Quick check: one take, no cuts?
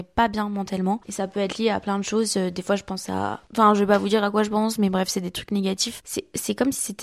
no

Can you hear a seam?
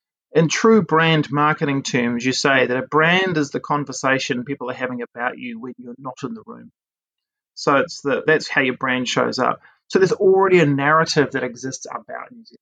yes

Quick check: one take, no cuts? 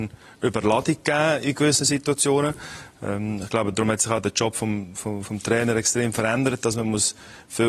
yes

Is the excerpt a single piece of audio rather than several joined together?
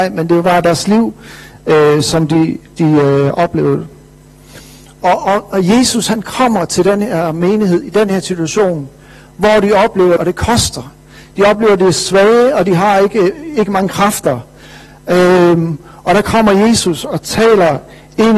no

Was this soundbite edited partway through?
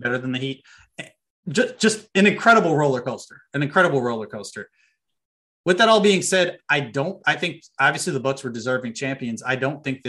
no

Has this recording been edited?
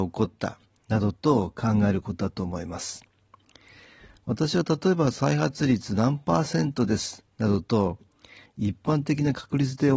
no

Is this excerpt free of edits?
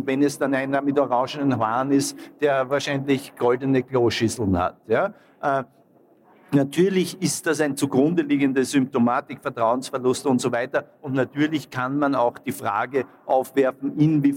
yes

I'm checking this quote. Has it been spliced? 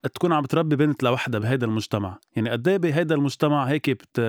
yes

